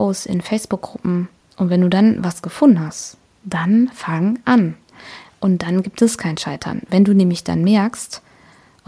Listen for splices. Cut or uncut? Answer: uncut